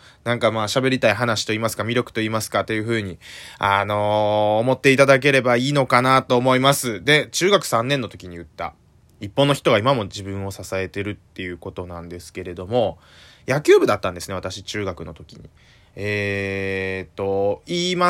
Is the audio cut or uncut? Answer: uncut